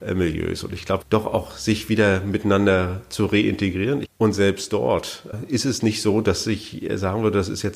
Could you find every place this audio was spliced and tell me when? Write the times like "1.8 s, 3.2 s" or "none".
1.0 s, 4.0 s, 5.3 s